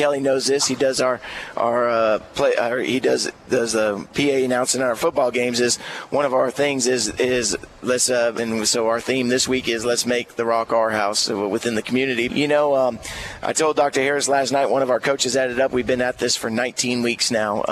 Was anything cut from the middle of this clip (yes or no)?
yes